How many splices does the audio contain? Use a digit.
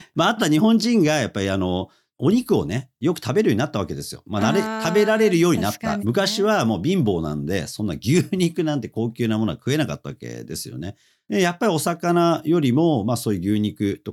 1